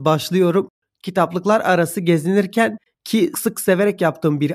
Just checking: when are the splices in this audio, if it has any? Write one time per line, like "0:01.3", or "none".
0:01.0
0:03.3